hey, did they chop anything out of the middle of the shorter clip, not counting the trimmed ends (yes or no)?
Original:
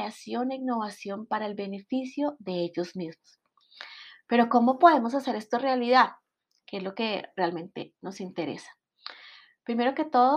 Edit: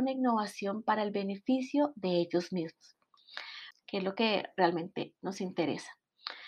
yes